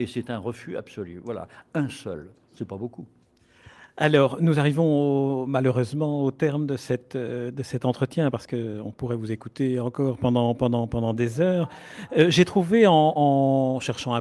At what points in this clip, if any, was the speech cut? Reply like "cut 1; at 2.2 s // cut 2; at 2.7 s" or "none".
none